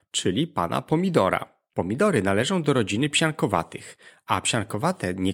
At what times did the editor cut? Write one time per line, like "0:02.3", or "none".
0:01.7